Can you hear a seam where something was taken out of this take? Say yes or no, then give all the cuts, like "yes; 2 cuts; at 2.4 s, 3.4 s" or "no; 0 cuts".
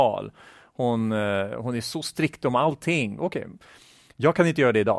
yes; 1 cut; at 3.2 s